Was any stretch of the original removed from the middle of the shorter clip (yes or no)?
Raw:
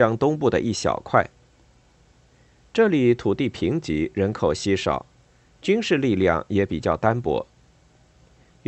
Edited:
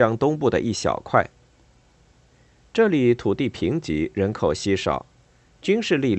no